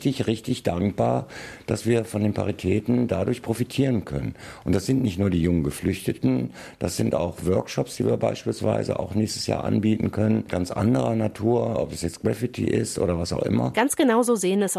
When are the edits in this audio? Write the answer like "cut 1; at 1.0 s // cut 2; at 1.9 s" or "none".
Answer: none